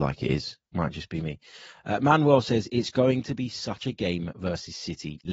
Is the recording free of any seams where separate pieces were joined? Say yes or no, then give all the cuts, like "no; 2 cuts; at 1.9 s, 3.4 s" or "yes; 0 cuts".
yes; 0 cuts